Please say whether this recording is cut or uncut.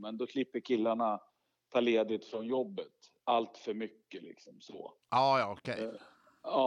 cut